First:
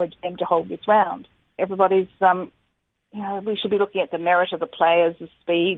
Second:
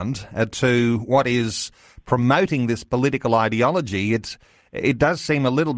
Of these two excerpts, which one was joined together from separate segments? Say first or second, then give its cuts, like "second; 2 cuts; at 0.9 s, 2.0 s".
first; 1 cut; at 1.6 s